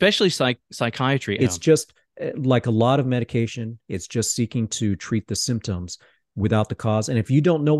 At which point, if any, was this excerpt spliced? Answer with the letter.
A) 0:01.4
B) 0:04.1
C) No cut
A